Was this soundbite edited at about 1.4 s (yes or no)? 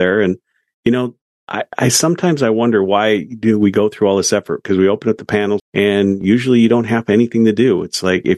no